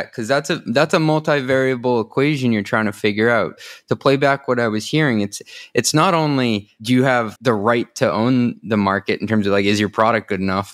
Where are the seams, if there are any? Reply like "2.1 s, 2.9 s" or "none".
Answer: 7.4 s